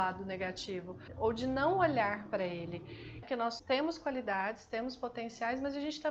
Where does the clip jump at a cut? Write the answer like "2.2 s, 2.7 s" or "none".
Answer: 3.2 s